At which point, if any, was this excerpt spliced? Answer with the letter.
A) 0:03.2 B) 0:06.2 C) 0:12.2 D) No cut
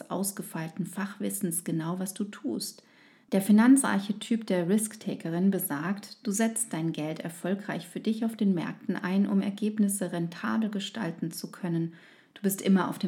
A